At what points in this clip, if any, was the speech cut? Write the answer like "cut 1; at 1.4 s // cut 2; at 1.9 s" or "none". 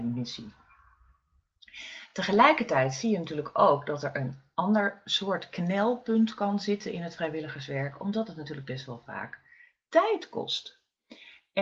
none